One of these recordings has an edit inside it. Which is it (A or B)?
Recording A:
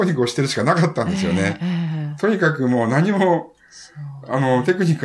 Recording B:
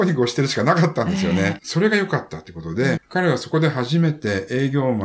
B